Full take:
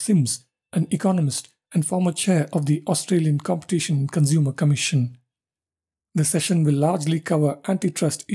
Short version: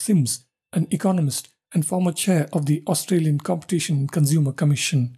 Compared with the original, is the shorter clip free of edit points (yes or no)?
yes